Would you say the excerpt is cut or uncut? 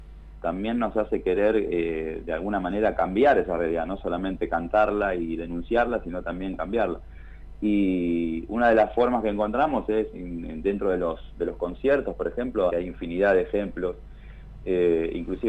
cut